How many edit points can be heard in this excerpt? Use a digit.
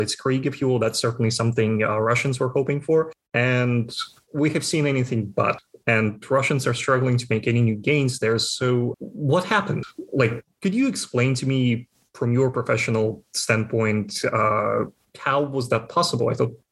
1